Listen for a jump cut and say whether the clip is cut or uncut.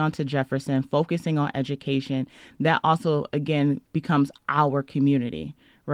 uncut